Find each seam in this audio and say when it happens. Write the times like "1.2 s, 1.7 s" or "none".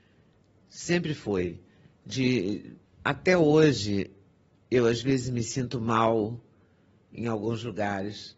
2.8 s